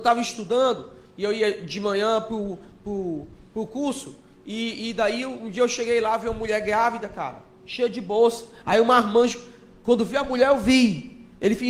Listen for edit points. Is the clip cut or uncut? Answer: uncut